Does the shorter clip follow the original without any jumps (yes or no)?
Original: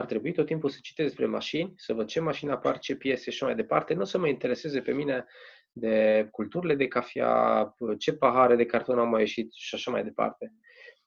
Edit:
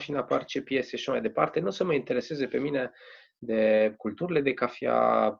yes